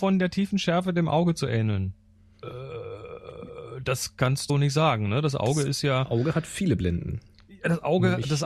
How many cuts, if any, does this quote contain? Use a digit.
1